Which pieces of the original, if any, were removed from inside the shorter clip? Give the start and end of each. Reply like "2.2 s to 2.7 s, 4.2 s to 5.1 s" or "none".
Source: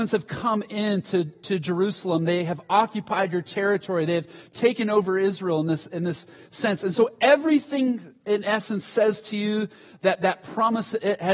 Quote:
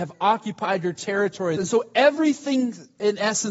4.1 s to 6.8 s